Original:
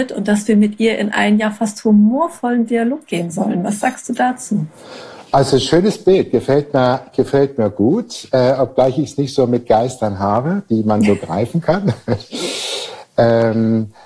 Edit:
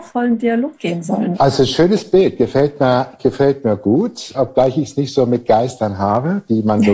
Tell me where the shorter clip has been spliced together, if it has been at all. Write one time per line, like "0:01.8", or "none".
0:01.3
0:04.3